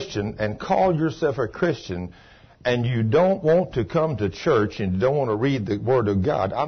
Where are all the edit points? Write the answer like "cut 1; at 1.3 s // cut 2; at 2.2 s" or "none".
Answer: none